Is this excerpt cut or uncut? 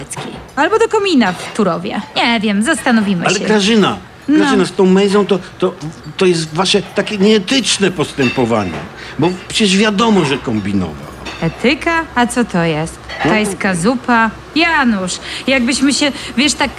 uncut